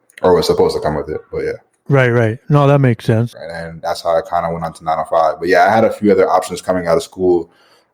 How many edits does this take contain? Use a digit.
1